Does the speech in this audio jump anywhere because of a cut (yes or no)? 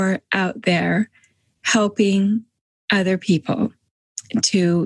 no